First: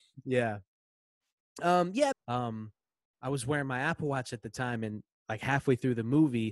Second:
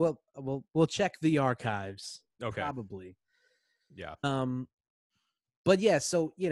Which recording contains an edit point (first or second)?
first